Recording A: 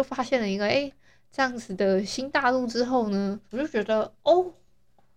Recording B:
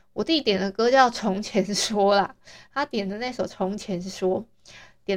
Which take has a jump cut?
A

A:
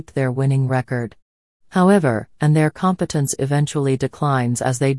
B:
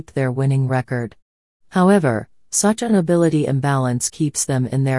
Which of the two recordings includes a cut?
A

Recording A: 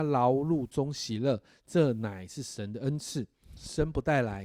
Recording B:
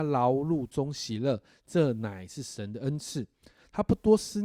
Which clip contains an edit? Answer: A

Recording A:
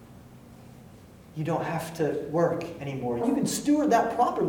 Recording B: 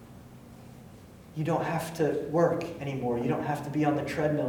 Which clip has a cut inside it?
A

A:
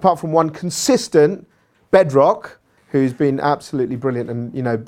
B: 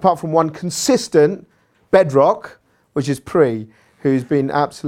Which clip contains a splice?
A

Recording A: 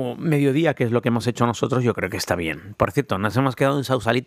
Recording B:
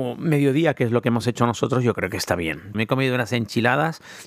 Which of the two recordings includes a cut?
B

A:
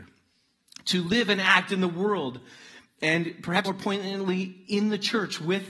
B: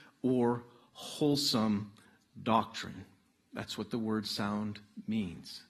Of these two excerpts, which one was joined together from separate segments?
A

